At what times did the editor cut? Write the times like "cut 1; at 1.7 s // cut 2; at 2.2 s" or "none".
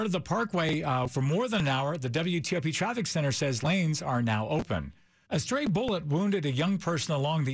cut 1; at 1.1 s // cut 2; at 5.3 s